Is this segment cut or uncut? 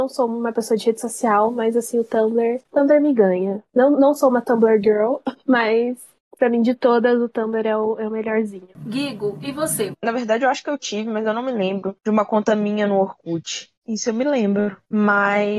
cut